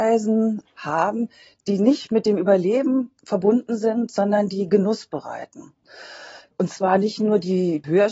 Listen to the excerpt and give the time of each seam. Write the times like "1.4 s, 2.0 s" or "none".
6.5 s